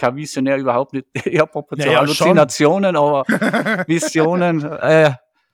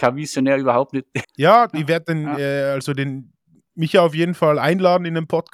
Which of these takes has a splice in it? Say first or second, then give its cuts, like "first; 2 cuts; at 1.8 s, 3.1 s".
second; 1 cut; at 1.2 s